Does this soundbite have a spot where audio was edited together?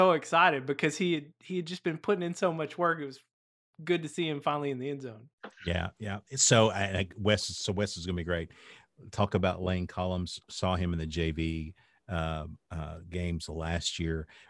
no; 0 cuts

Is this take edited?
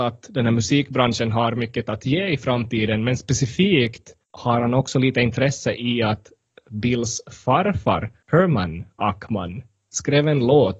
no; 0 cuts

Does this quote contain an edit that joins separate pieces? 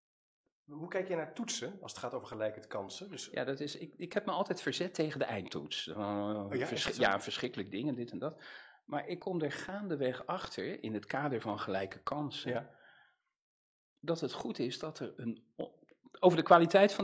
no; 0 cuts

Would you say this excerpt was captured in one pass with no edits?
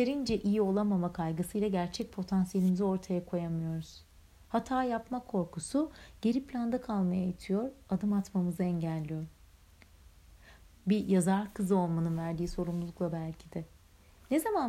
no; 1 cut; at 10.7 s

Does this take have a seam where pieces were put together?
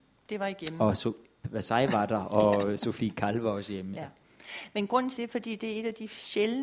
yes; 1 cut; at 5.2 s

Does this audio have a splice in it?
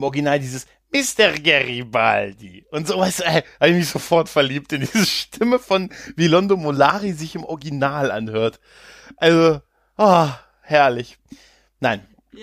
no; 0 cuts

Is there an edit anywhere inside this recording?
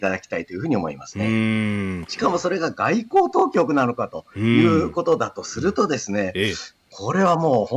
yes; 1 cut; at 2.0 s

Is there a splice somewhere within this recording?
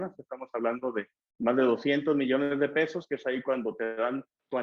no; 0 cuts

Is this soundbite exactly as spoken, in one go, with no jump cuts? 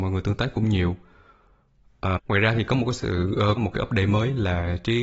no; 2 cuts; at 2.2 s, 3.6 s

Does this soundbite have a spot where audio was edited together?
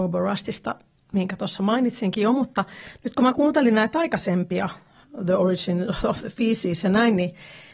no; 0 cuts

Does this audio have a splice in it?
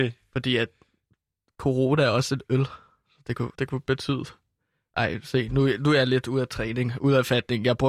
yes; 1 cut; at 3.5 s

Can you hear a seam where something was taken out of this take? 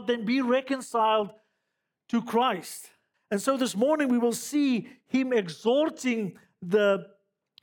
yes; 1 cut; at 3.1 s

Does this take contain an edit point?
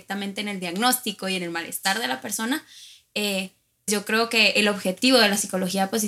yes; 1 cut; at 3.9 s

